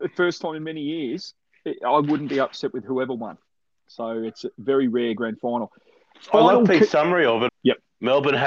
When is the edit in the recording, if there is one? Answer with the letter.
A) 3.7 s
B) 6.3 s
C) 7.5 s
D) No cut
C